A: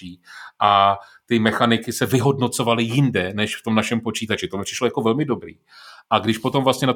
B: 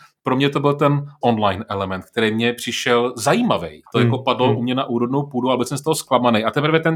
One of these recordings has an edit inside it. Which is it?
B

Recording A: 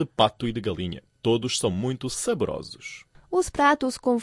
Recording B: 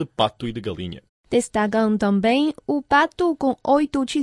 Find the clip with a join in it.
B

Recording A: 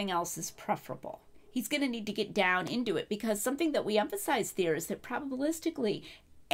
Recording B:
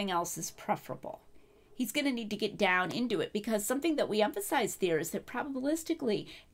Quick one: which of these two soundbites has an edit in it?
A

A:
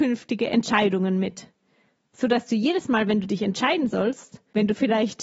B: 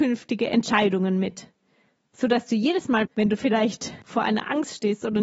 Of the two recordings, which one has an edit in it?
B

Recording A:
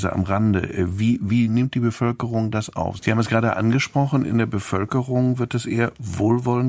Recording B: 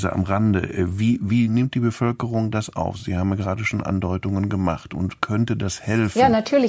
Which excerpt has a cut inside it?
A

